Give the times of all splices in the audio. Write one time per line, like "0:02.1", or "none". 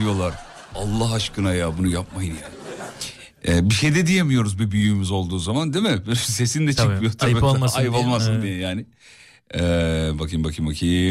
none